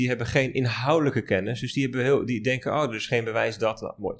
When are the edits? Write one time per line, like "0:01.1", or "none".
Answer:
none